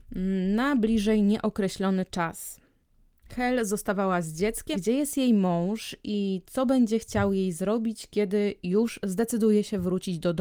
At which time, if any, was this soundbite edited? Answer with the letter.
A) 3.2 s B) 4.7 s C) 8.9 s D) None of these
B